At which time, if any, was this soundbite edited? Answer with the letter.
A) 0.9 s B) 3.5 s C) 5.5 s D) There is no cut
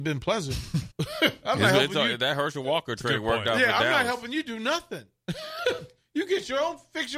A